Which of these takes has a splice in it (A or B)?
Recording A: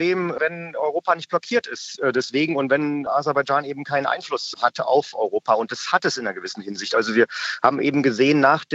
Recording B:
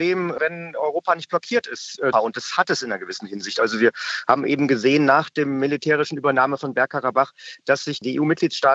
B